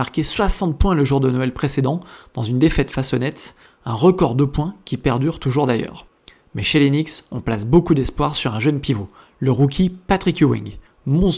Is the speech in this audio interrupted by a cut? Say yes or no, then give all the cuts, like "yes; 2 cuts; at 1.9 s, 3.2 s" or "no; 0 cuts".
no; 0 cuts